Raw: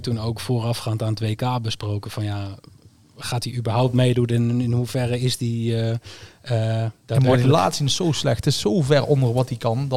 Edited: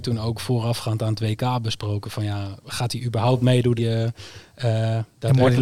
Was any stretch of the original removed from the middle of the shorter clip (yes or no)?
yes